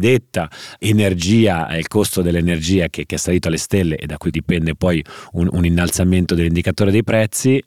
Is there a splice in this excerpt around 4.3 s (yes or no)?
yes